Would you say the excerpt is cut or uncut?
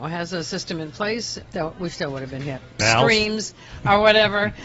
cut